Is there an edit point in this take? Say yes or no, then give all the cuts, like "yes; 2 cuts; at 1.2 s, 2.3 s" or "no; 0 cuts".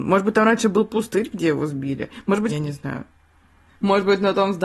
yes; 1 cut; at 2.5 s